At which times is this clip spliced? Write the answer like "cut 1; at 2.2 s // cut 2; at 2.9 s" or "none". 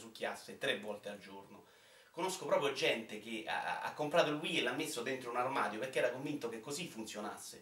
none